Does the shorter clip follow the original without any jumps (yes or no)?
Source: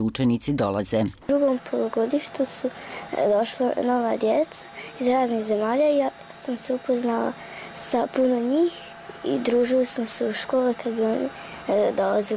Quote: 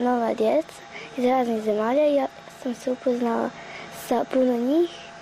yes